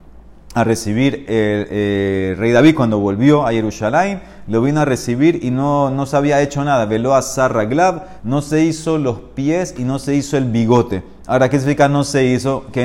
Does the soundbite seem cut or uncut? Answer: cut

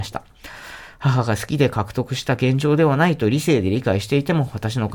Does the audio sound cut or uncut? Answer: uncut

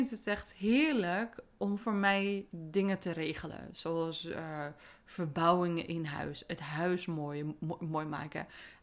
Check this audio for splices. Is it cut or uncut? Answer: uncut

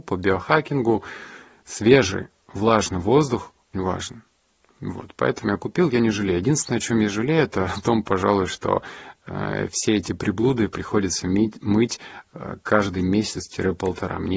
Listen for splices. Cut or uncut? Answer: cut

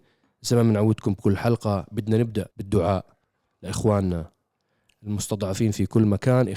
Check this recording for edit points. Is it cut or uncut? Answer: cut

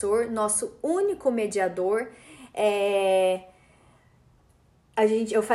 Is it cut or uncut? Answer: uncut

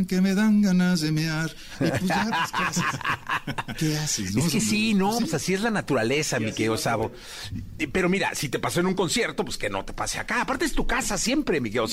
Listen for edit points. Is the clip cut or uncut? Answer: uncut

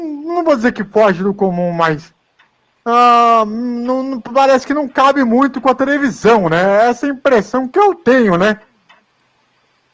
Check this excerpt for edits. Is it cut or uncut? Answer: uncut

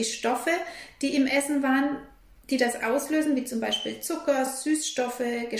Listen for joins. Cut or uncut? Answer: uncut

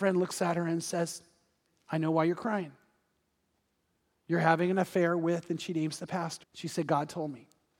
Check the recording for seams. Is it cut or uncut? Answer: cut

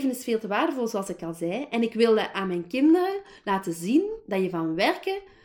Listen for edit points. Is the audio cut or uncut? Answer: uncut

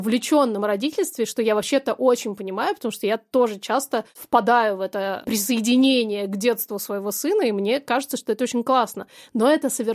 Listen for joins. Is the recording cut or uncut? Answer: uncut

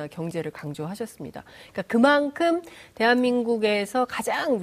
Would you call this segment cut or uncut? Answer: uncut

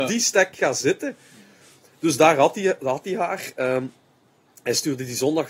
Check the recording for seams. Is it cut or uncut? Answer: uncut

